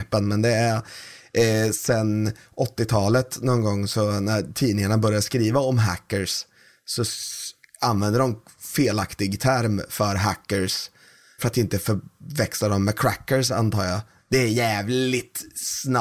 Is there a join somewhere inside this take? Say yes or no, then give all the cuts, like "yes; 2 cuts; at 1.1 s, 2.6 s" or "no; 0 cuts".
yes; 2 cuts; at 11.4 s, 14.2 s